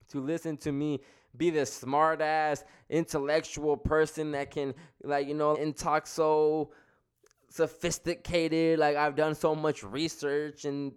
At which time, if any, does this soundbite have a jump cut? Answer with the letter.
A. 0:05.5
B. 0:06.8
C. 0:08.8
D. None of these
A